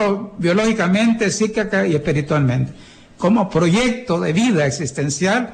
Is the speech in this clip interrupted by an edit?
no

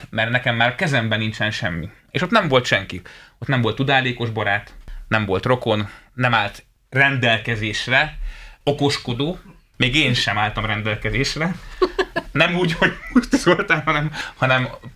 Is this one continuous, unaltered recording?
yes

